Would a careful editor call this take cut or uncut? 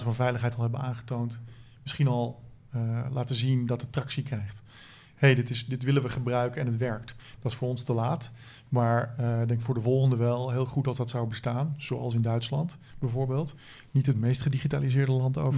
cut